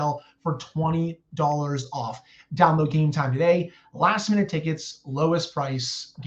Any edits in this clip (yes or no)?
no